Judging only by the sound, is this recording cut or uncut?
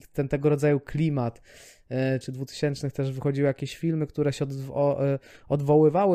cut